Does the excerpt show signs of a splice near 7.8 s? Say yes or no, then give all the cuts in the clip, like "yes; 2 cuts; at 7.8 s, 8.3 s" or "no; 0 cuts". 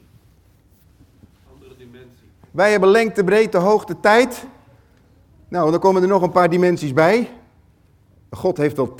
no; 1 cut; at 2.4 s